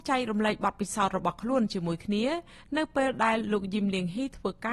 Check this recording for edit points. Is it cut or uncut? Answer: uncut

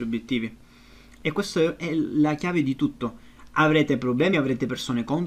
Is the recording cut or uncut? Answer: uncut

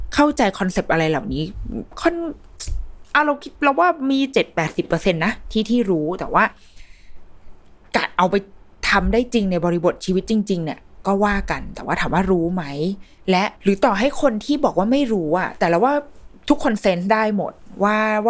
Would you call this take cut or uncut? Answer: cut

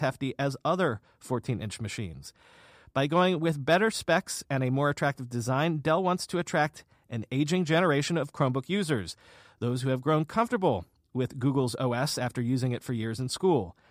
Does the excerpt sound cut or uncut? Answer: uncut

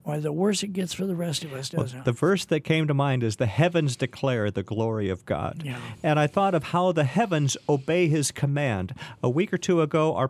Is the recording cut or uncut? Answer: uncut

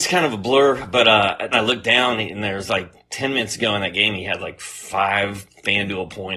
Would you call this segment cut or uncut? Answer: cut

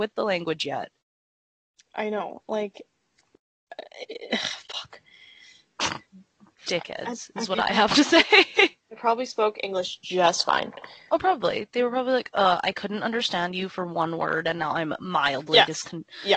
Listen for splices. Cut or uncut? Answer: uncut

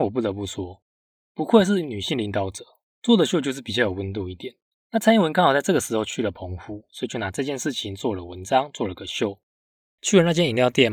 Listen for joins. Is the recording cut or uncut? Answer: cut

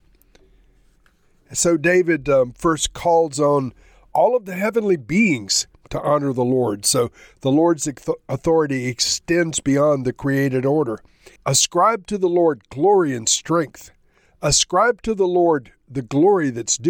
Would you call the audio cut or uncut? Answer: cut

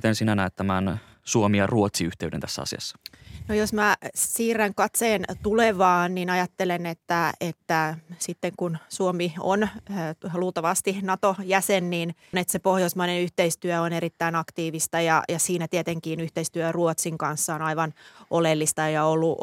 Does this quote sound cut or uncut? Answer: cut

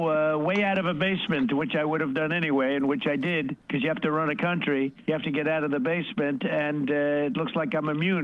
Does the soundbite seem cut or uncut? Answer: uncut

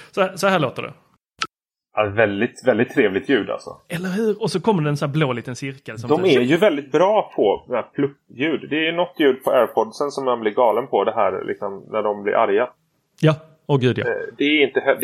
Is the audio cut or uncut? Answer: uncut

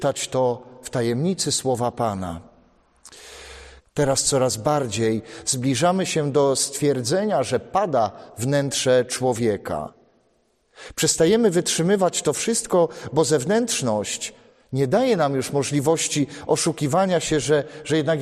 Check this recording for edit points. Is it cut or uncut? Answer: cut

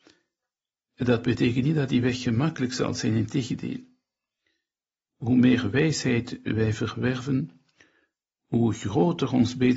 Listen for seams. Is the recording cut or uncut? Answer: uncut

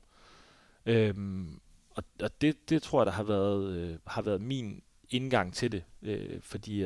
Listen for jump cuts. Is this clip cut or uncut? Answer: uncut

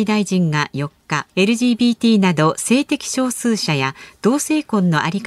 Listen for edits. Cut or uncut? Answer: cut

